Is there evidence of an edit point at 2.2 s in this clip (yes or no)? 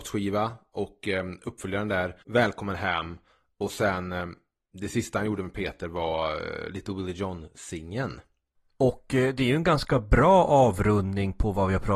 yes